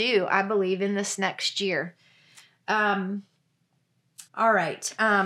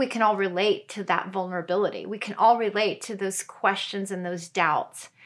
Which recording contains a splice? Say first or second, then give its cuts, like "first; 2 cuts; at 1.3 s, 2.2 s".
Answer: first; 1 cut; at 4.3 s